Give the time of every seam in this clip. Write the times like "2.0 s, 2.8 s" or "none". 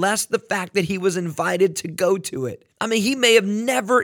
2.7 s

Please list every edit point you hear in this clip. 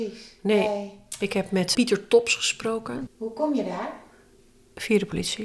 1.7 s, 3.1 s

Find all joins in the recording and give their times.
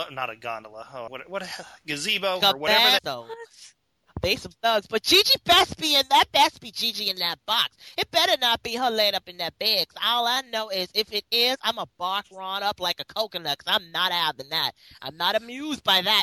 1.1 s, 3.0 s

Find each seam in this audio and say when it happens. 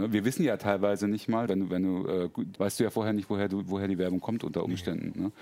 1.5 s, 2.6 s

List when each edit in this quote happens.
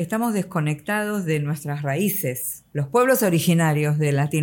2.7 s

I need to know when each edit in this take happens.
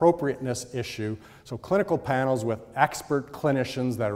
none

